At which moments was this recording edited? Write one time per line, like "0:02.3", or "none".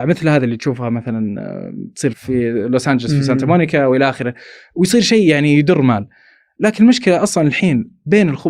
0:02.1